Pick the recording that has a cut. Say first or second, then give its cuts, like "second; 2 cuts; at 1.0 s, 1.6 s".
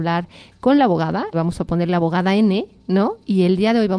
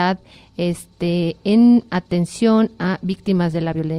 first; 1 cut; at 1.3 s